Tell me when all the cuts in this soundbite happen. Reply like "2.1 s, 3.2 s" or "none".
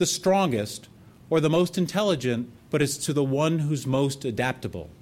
2.6 s